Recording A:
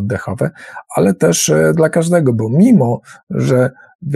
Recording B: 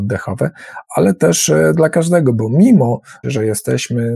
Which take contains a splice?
B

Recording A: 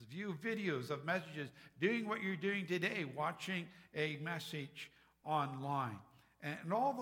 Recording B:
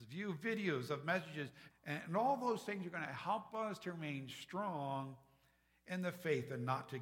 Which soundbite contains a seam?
B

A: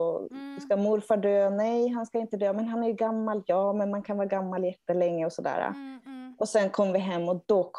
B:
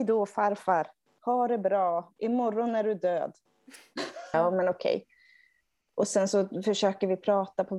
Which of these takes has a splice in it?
B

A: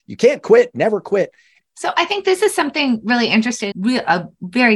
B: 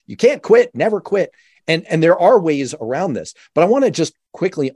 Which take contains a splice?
A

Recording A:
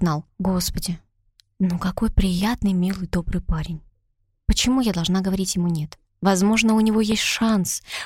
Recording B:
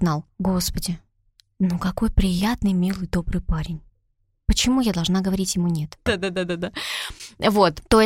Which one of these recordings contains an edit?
B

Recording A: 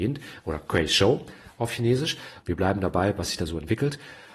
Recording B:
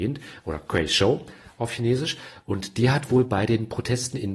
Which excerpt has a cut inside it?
A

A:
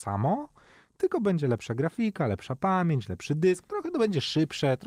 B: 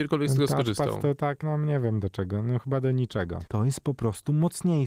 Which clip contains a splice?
B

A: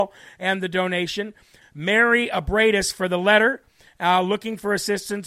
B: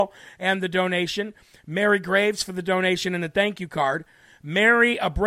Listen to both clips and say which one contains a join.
A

